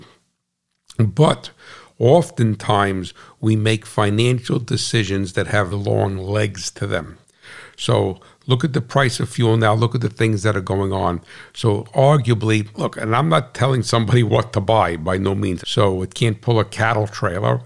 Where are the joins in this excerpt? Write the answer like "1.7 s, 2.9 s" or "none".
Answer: 5.7 s, 12.7 s, 15.6 s